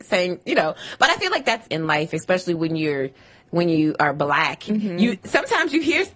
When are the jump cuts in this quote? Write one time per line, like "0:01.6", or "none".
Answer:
0:01.7